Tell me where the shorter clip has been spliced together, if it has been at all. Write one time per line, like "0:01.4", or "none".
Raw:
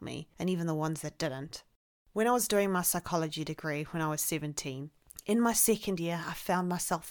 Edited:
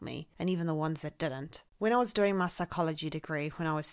0:01.7